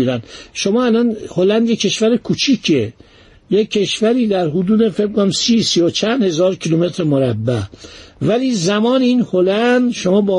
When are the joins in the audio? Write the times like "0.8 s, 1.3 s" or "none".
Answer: none